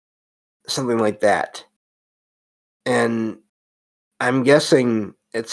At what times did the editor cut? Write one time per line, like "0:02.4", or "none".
0:02.8